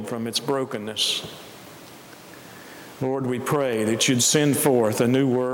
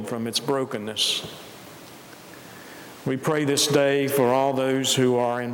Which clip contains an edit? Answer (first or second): first